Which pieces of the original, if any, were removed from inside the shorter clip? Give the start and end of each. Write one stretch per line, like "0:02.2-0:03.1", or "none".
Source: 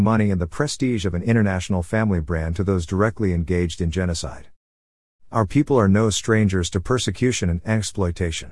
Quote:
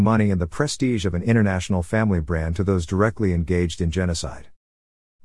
none